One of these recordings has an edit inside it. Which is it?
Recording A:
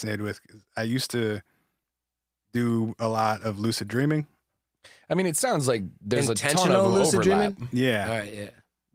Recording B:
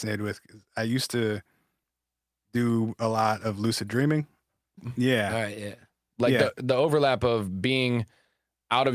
B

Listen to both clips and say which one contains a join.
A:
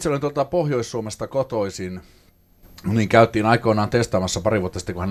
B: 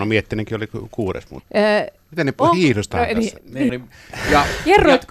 B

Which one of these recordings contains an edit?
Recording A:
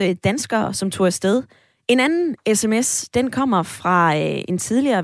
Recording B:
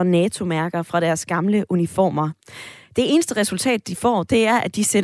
A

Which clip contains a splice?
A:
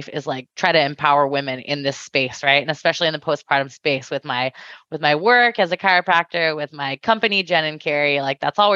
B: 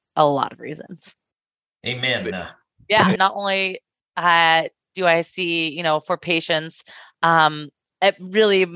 B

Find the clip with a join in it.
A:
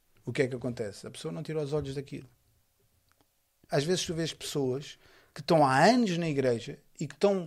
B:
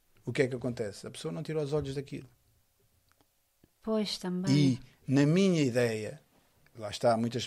A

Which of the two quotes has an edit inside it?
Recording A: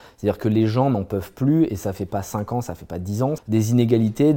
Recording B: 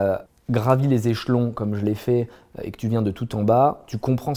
A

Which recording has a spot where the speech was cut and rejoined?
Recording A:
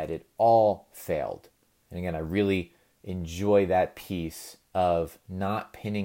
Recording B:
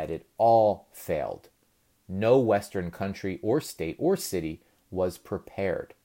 A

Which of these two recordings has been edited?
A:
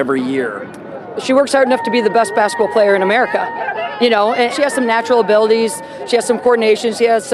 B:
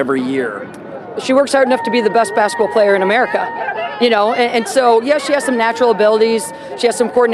A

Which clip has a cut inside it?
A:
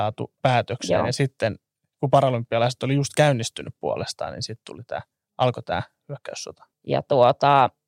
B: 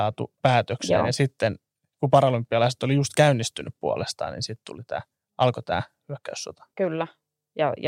A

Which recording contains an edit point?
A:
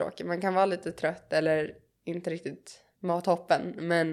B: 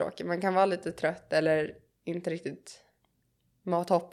A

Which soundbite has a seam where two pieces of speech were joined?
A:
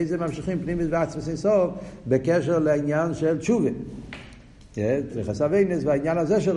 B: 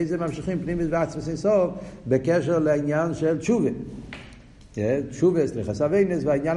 A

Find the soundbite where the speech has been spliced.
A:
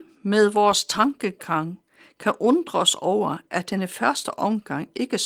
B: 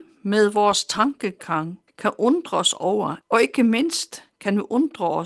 B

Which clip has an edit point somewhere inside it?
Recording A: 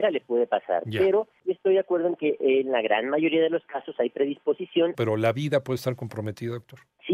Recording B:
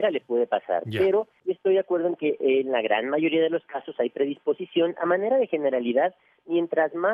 A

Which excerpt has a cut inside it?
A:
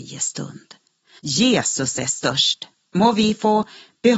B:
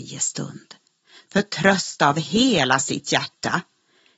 A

